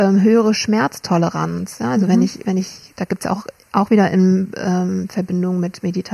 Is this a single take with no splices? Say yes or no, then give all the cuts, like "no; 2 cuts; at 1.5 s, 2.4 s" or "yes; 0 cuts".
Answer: yes; 0 cuts